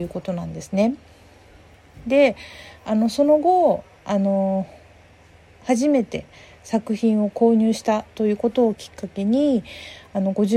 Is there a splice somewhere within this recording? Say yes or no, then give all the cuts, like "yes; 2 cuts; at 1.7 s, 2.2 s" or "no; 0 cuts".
no; 0 cuts